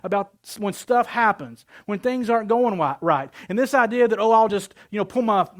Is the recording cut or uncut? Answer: uncut